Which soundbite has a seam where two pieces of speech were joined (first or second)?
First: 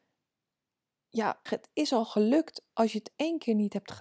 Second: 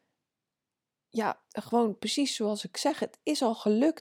first